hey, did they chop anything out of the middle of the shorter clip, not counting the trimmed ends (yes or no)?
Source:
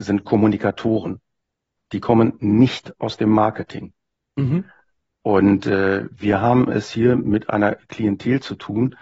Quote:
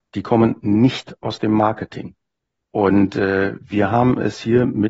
yes